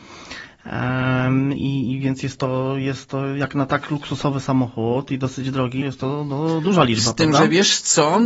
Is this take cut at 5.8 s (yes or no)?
yes